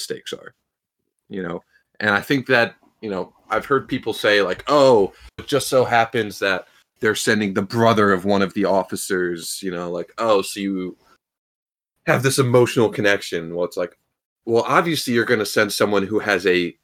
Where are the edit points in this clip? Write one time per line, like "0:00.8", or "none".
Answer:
0:05.4